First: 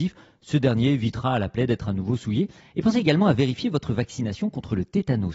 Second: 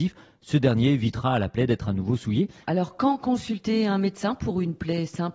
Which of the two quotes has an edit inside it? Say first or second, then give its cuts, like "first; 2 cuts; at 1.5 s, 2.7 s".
second; 1 cut; at 2.6 s